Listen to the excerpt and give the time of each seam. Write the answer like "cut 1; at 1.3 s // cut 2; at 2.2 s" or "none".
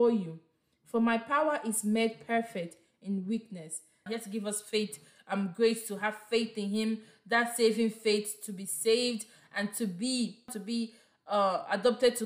cut 1; at 4.1 s